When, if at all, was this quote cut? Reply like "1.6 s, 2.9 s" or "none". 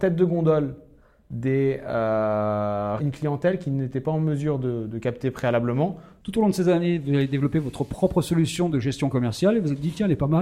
3.0 s